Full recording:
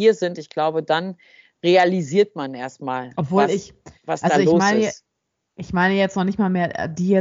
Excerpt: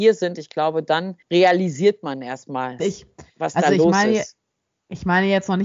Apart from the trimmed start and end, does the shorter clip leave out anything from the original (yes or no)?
yes